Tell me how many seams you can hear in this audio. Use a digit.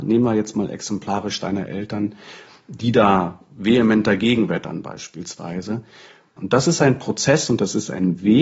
1